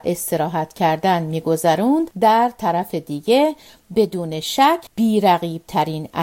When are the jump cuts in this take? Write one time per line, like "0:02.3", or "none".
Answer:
0:04.9